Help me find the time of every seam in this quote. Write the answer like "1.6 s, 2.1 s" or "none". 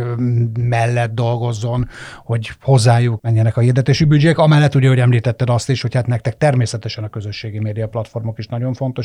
3.2 s